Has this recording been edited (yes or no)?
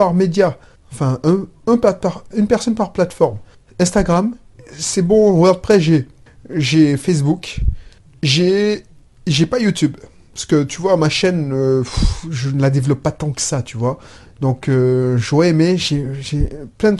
yes